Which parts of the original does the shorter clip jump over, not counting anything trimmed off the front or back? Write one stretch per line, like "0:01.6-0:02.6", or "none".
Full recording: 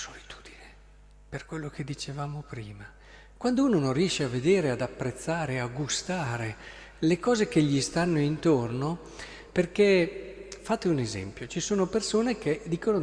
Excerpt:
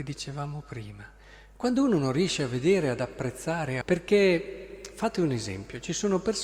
0:05.6-0:09.5